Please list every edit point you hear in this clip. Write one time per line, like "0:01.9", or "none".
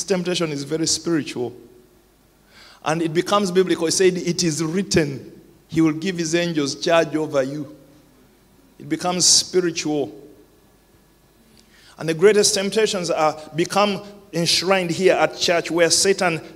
none